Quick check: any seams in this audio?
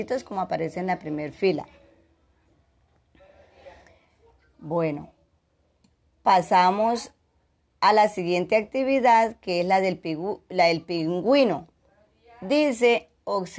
yes; 1 cut; at 4.5 s

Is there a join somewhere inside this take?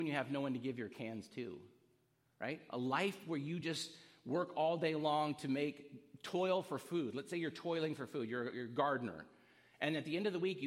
no; 0 cuts

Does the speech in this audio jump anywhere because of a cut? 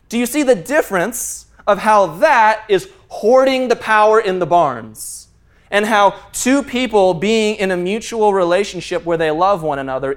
no; 0 cuts

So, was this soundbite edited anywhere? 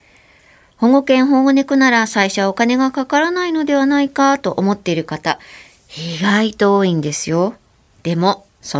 no; 0 cuts

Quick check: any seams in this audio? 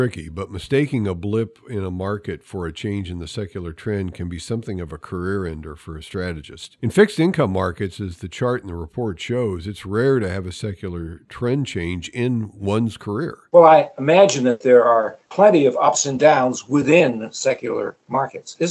yes; 1 cut; at 13.5 s

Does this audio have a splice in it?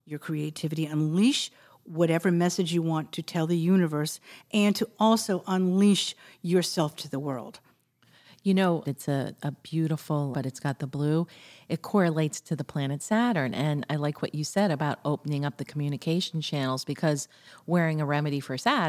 yes; 2 cuts; at 8.8 s, 10.3 s

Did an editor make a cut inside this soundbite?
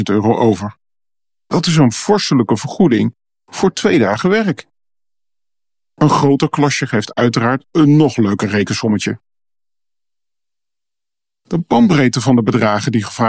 no; 0 cuts

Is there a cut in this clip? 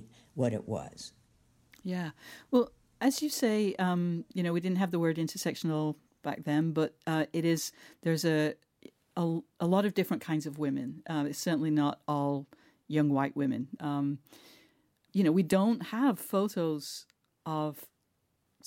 yes; 1 cut; at 13.8 s

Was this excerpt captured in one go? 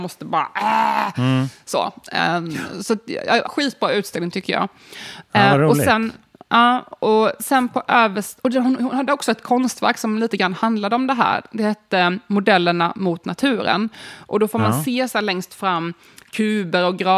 no; 1 cut; at 3.4 s

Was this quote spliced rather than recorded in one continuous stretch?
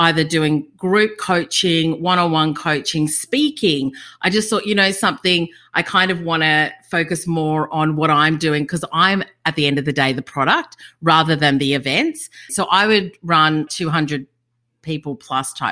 yes; 2 cuts; at 12.5 s, 13.7 s

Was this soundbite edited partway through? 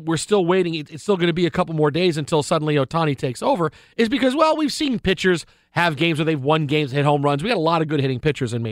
no; 0 cuts

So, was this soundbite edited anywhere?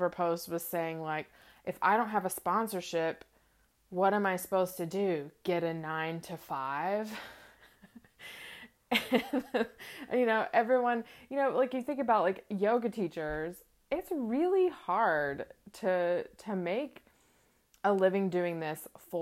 no; 0 cuts

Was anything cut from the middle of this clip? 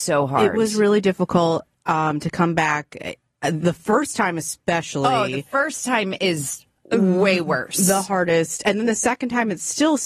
no; 0 cuts

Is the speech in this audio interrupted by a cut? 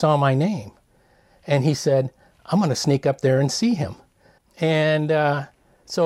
yes; 1 cut; at 4.4 s

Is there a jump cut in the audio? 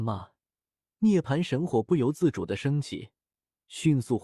no; 0 cuts

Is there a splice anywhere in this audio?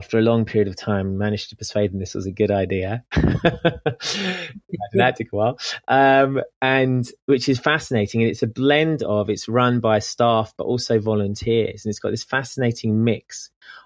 no; 0 cuts

